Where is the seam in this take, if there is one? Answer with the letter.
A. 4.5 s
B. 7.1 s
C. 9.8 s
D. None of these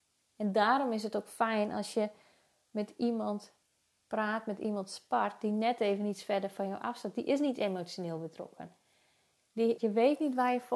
C